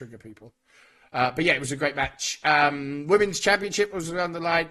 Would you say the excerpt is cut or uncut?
uncut